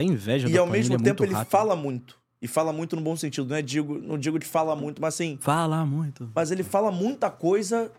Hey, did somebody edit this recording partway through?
no; 0 cuts

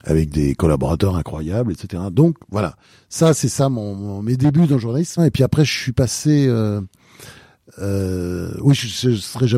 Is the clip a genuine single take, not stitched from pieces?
no; 1 cut; at 5.2 s

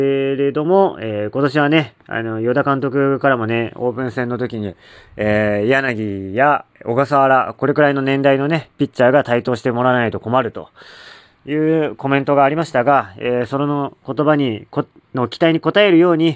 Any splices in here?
no; 0 cuts

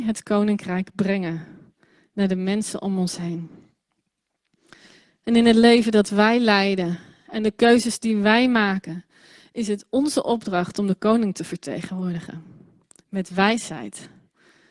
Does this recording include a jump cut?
no; 0 cuts

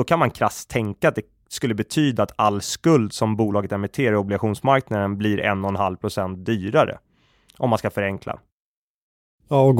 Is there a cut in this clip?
no; 0 cuts

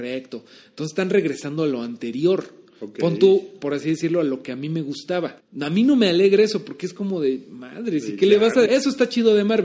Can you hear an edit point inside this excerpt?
yes; 2 cuts; at 5.4 s, 8.6 s

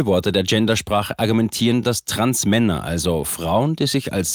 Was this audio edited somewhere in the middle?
no; 0 cuts

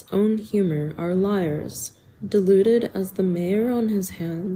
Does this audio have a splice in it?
no; 0 cuts

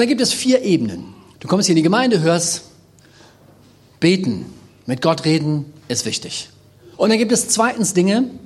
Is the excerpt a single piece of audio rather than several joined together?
no; 2 cuts; at 1.3 s, 6.9 s

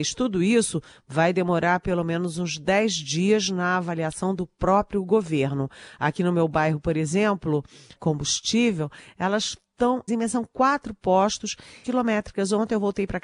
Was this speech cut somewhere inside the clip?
yes; 3 cuts; at 8.0 s, 10.1 s, 11.8 s

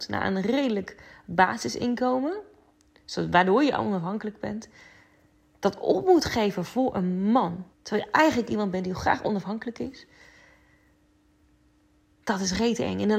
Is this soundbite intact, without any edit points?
no; 1 cut; at 7.7 s

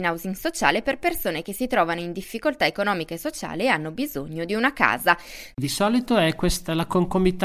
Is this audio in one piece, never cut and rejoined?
no; 1 cut; at 5.5 s

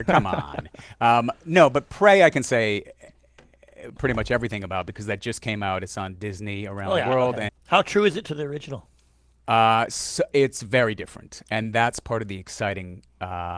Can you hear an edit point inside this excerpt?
yes; 1 cut; at 7.5 s

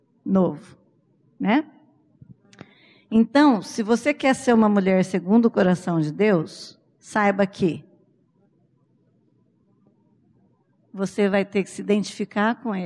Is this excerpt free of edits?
yes; 0 cuts

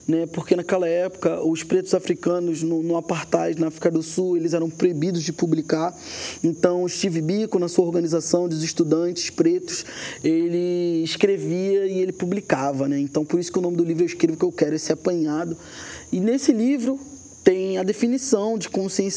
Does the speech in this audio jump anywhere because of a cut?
no; 0 cuts

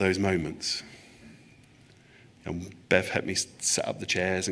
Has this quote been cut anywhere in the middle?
no; 0 cuts

